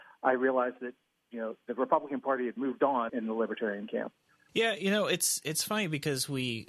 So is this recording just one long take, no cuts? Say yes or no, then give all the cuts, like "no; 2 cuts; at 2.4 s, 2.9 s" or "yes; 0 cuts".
no; 2 cuts; at 3.1 s, 4.5 s